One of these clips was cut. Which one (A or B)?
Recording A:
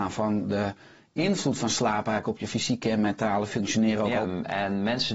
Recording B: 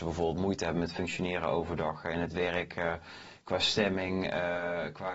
A